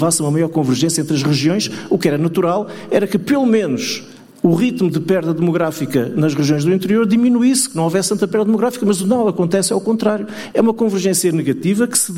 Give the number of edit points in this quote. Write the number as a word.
one